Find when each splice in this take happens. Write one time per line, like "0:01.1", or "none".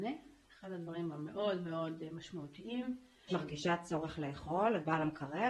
0:03.3